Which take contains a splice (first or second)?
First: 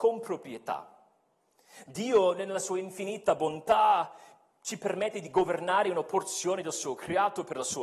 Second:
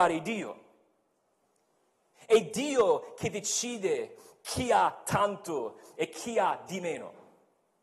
second